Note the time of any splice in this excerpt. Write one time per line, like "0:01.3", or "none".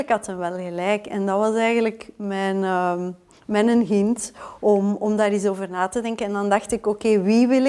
none